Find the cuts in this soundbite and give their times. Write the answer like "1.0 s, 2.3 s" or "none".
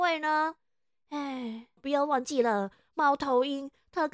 1.8 s